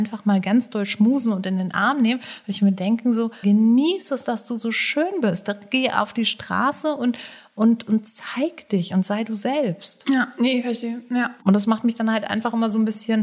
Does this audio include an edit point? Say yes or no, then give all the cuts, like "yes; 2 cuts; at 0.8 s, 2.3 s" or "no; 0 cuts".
yes; 2 cuts; at 3.4 s, 11.4 s